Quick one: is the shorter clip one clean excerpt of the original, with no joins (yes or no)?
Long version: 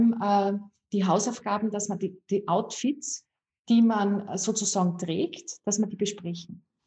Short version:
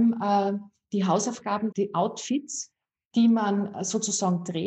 no